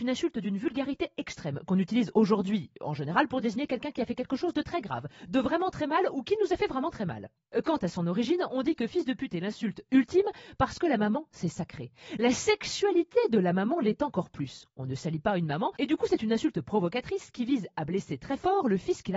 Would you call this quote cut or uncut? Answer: uncut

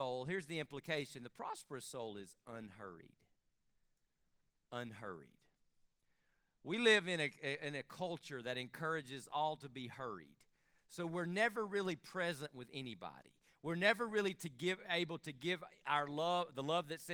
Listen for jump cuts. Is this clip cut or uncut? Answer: uncut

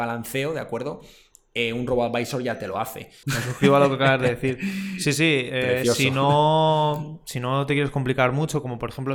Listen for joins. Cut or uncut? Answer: cut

